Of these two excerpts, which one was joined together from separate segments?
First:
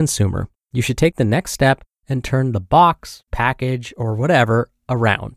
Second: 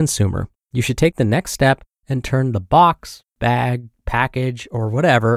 first; 1 cut; at 3.3 s

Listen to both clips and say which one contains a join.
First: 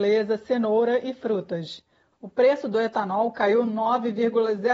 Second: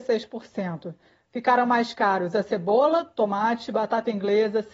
first; 1 cut; at 2.1 s

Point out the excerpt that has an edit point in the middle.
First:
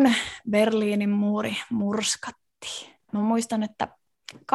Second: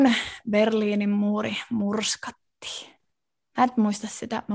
first; 1 cut; at 3.1 s

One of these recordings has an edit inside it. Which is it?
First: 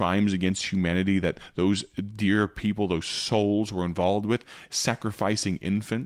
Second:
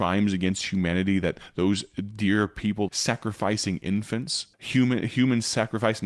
second; 2 cuts; at 2.9 s, 4.5 s

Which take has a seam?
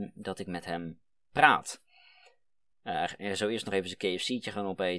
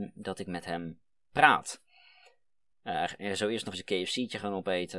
second; 1 cut; at 3.7 s

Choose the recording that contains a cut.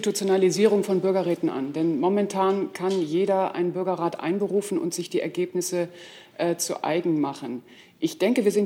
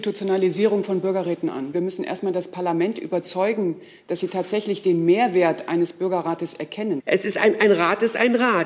second; 2 cuts; at 1.7 s, 7.0 s

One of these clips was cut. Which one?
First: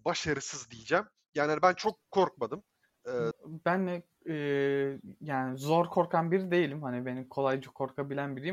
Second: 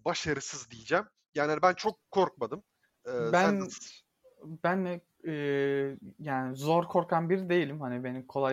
first; 1 cut; at 3.3 s

